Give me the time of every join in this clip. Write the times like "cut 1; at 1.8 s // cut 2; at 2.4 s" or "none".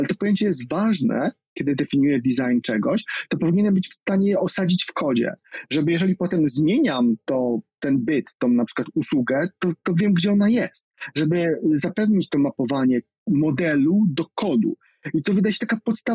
none